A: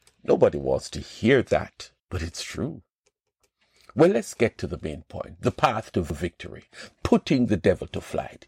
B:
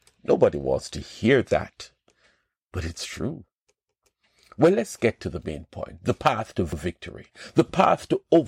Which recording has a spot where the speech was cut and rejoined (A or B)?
A